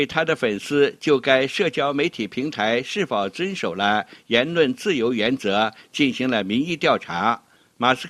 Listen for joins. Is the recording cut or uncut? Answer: uncut